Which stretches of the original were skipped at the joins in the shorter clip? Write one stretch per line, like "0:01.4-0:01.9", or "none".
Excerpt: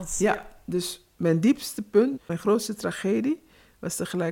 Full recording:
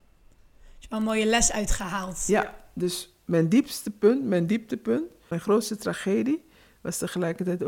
0:04.2-0:05.2